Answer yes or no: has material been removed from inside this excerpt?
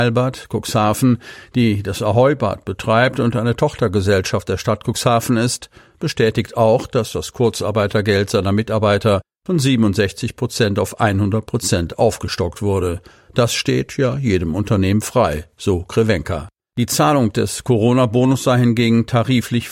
no